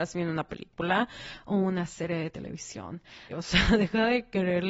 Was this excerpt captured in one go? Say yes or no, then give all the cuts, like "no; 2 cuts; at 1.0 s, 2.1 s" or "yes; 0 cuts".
no; 1 cut; at 3.3 s